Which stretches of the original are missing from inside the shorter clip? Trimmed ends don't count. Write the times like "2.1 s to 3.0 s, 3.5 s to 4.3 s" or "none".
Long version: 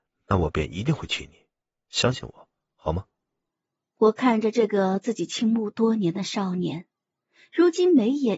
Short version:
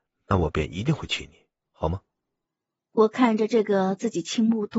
1.6 s to 2.7 s